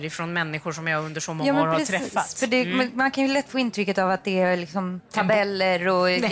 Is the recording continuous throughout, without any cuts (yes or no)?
no